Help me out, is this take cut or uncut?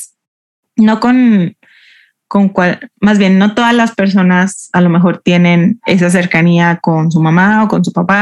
uncut